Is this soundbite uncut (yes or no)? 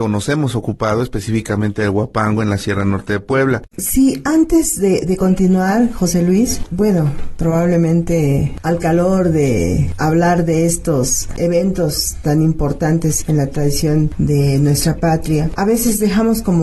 no